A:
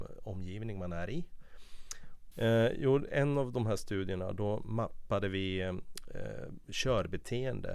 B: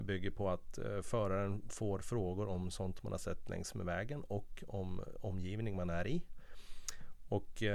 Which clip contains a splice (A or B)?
A